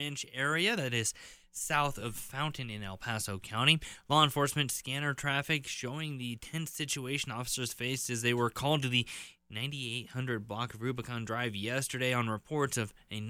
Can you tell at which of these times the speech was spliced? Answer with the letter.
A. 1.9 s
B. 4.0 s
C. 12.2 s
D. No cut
D